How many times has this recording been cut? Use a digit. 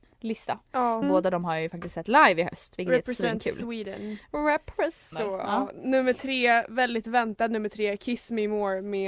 2